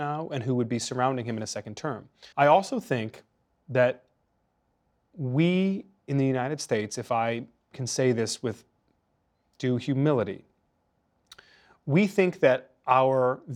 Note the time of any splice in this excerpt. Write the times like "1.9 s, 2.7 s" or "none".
2.3 s